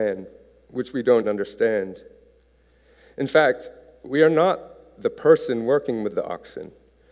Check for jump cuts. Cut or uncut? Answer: cut